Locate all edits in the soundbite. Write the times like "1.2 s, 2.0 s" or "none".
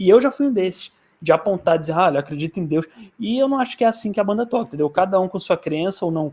none